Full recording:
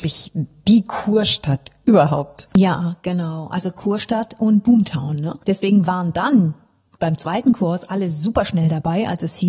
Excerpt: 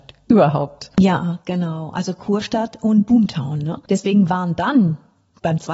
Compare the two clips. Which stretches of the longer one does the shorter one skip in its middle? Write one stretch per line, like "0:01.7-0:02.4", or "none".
none